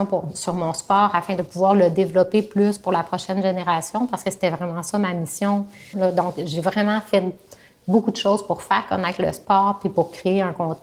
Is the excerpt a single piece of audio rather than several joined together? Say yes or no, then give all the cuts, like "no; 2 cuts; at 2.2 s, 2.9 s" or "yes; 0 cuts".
no; 1 cut; at 5.9 s